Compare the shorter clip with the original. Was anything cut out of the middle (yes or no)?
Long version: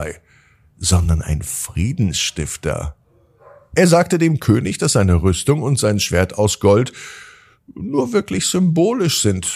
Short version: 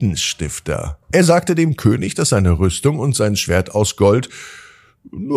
yes